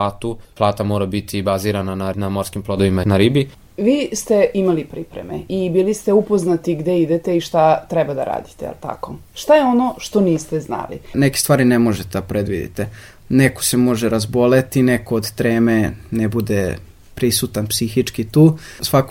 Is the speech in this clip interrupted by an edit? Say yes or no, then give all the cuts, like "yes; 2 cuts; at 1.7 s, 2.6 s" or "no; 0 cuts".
no; 0 cuts